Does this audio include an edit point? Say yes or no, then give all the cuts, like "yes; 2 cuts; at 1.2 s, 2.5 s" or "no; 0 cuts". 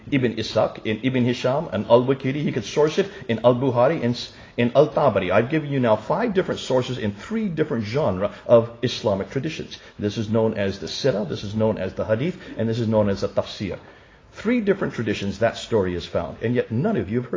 no; 0 cuts